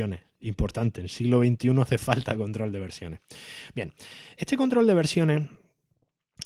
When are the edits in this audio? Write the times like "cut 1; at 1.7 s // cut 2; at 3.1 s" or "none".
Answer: cut 1; at 4.4 s